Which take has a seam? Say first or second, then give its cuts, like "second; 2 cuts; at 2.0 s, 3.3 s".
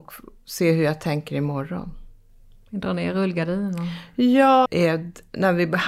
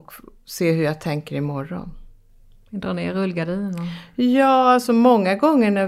first; 1 cut; at 4.6 s